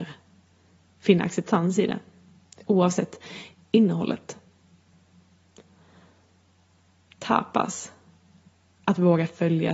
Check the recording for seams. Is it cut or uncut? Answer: uncut